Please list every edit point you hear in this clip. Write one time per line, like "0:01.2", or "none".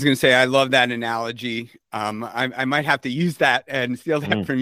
none